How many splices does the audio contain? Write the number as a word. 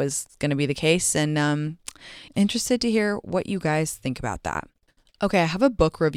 one